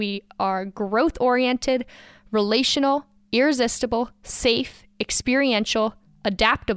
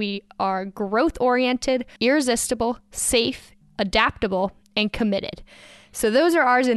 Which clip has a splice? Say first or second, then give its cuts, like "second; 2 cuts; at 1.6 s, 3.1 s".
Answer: second; 2 cuts; at 2.0 s, 3.6 s